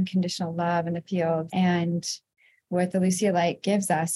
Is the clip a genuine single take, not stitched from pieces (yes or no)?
no